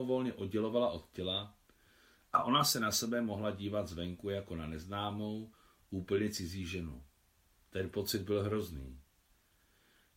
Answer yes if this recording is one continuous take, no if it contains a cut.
yes